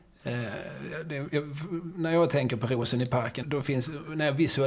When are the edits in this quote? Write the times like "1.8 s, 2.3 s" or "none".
3.4 s

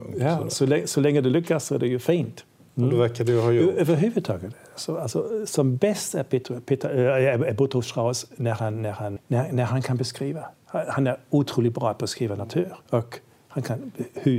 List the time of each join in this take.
9.2 s, 12.8 s

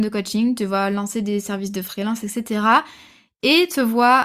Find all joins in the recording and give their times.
none

